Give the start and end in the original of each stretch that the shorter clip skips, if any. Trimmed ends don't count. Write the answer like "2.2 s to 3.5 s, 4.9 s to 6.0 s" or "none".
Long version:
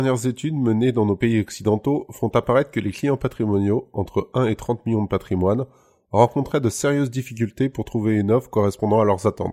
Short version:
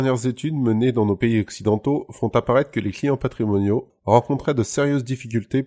3.9 s to 6.0 s